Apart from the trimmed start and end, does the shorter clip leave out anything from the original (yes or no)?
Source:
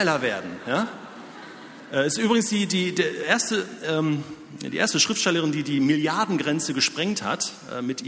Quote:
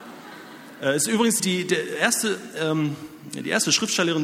yes